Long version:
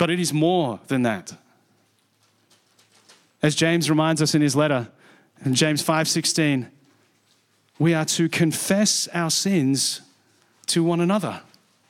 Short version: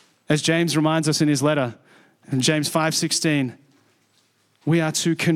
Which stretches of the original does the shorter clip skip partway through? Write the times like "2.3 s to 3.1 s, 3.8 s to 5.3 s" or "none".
none